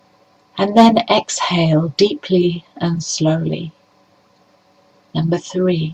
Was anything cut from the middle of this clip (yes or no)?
no